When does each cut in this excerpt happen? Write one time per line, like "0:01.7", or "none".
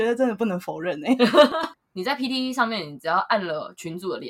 0:01.7